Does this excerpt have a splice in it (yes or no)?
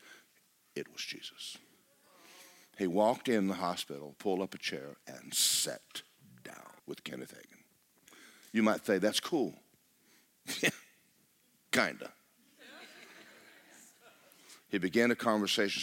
yes